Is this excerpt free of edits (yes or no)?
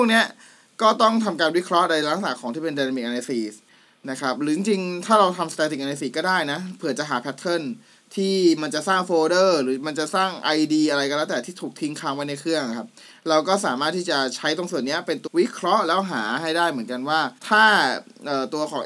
no